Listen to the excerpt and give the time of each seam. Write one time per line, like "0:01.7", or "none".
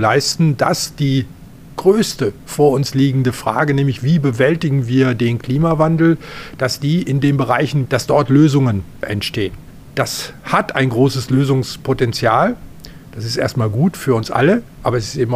0:07.8